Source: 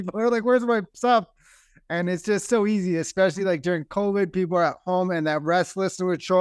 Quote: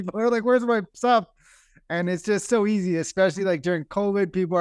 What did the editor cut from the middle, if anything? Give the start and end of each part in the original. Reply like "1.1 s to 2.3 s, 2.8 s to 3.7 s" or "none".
none